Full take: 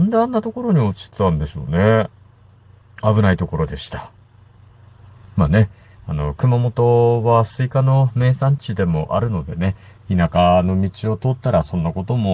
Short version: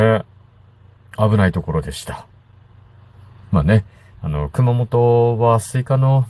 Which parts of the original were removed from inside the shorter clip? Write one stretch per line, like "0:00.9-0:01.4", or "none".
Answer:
none